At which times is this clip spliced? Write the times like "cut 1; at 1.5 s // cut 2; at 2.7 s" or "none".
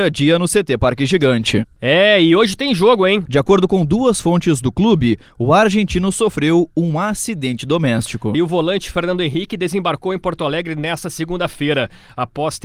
cut 1; at 3.3 s // cut 2; at 8.3 s